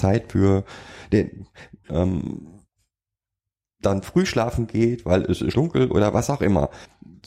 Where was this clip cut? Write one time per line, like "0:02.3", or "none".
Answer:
0:01.8
0:05.5